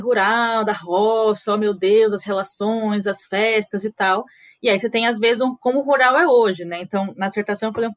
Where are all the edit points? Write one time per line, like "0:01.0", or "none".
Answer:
none